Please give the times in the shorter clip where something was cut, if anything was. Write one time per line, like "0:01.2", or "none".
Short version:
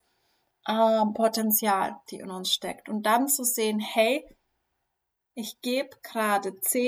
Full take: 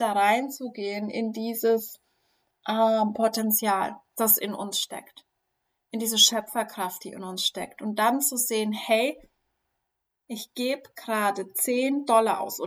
0:02.1